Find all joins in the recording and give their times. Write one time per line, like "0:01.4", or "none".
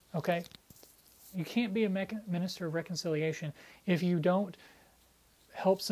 0:01.3